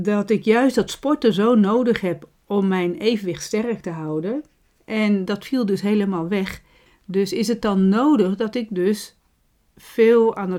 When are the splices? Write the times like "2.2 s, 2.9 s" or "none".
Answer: 6.9 s